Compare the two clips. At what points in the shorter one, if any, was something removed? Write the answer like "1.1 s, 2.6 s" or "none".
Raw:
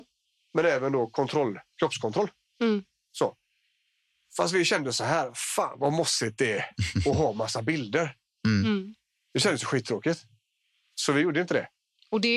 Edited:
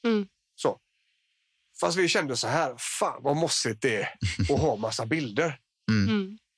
none